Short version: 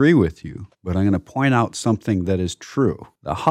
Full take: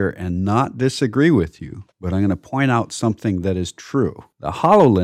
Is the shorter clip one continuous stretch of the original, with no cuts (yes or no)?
yes